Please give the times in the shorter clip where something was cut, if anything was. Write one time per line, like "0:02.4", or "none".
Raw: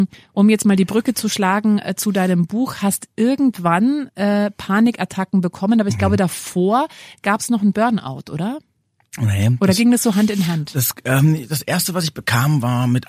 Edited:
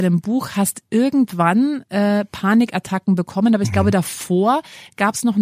none